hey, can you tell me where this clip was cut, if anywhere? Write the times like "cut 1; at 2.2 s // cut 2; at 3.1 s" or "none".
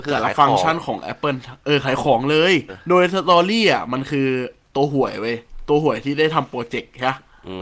cut 1; at 2.7 s